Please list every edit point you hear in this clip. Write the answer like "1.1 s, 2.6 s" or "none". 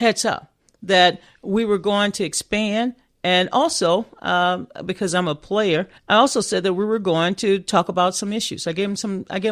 6.0 s

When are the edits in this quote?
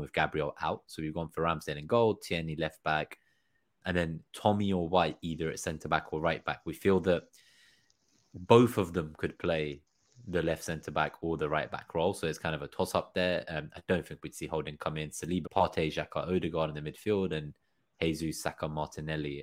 15.5 s

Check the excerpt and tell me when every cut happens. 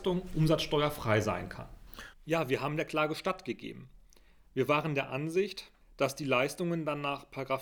2.1 s

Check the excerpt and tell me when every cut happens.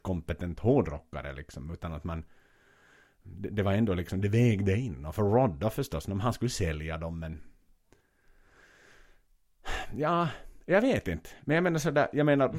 none

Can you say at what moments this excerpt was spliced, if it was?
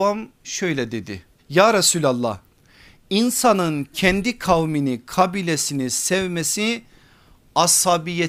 1.4 s

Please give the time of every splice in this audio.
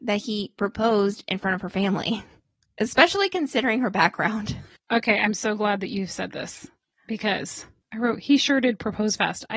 none

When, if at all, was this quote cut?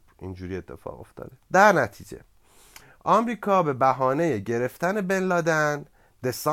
1.4 s

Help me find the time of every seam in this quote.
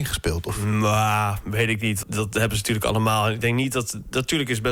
2.0 s

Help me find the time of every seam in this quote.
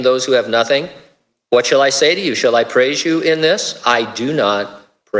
none

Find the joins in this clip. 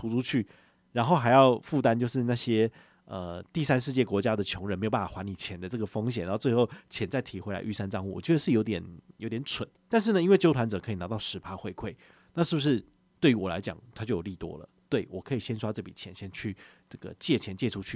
9.8 s

